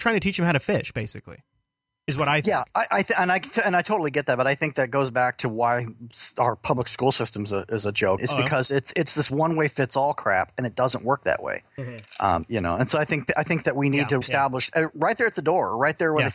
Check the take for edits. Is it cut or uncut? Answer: cut